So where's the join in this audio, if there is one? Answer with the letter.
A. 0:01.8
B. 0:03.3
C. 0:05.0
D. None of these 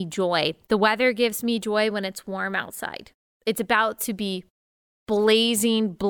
D